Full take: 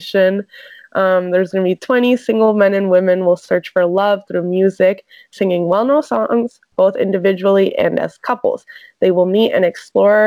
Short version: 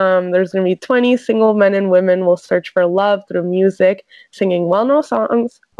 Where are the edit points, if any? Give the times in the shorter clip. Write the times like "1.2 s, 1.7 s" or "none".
none